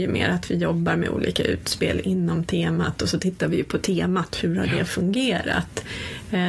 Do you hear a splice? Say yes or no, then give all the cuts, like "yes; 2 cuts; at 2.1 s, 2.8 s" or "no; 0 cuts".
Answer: no; 0 cuts